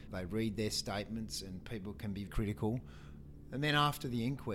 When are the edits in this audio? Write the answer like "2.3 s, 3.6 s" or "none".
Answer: 2.3 s